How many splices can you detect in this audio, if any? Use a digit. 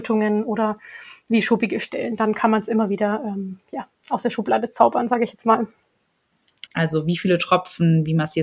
1